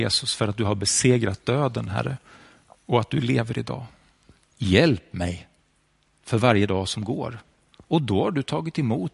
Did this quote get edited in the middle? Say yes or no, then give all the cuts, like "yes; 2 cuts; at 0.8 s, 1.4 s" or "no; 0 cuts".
yes; 2 cuts; at 4.4 s, 7.7 s